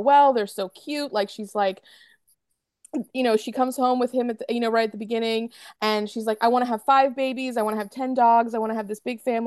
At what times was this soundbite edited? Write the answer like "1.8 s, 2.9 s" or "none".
none